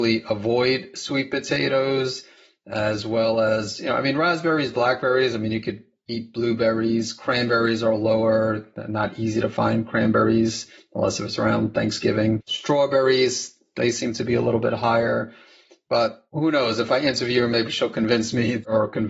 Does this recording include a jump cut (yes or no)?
yes